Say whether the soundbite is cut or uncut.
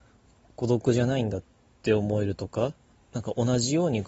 cut